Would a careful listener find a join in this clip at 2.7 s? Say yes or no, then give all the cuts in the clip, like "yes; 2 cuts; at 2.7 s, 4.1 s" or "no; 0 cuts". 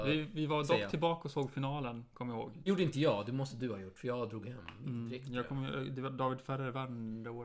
yes; 1 cut; at 2.7 s